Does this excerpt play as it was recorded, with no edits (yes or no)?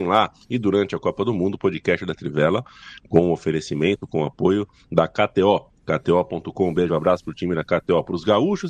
yes